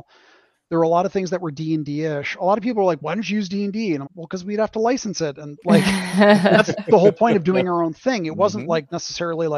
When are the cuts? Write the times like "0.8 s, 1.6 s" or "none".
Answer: 4.1 s